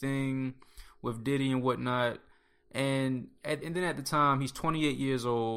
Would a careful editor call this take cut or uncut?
uncut